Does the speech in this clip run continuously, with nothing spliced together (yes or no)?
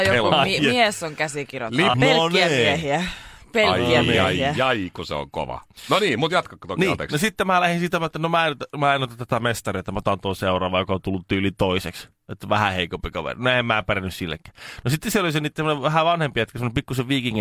no